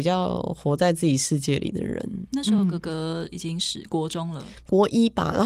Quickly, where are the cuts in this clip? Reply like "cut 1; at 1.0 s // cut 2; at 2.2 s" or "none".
none